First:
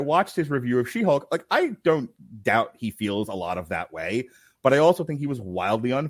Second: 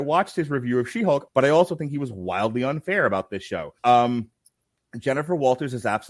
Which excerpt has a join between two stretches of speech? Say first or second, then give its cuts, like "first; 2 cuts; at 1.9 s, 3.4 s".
second; 2 cuts; at 1.3 s, 3.8 s